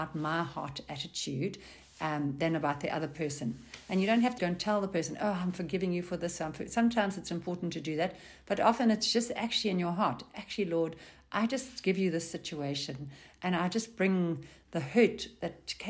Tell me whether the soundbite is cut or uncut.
cut